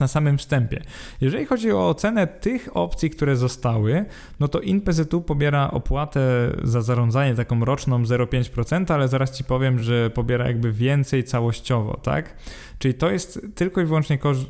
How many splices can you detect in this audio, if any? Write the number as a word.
zero